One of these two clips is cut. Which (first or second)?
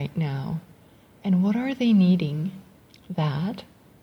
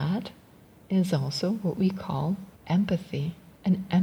first